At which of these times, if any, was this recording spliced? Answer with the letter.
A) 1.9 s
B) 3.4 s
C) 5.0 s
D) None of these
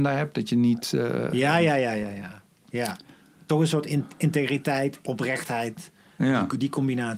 C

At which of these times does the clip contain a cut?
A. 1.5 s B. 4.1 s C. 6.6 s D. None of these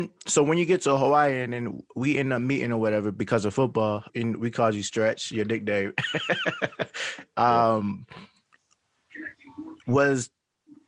B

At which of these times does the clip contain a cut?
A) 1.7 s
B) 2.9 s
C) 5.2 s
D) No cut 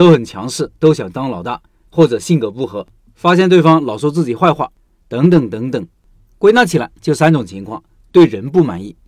D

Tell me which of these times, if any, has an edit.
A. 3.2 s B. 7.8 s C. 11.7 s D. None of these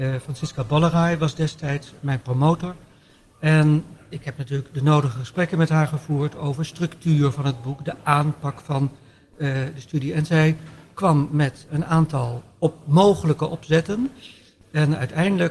C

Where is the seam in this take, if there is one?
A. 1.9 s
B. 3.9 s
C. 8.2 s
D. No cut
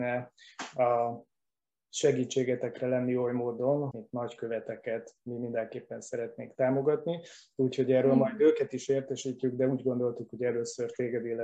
B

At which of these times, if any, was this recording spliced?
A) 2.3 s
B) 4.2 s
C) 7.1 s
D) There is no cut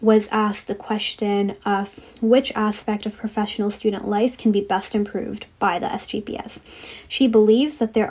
D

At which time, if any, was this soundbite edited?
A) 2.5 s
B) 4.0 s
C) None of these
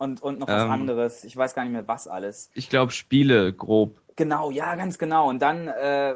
C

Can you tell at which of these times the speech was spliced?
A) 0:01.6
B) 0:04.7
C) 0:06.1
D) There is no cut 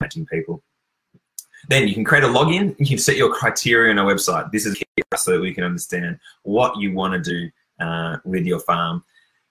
B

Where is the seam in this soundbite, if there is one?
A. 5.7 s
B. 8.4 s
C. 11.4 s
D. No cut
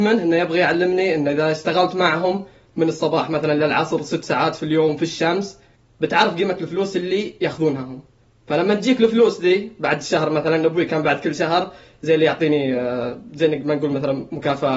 D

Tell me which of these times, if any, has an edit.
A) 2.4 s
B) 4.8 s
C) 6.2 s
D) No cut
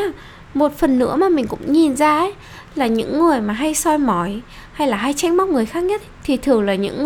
C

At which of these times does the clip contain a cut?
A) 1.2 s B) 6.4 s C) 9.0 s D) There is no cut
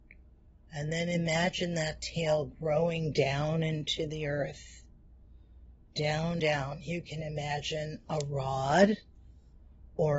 B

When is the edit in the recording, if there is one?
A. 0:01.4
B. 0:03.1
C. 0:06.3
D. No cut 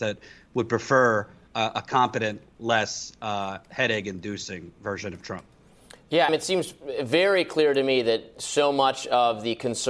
C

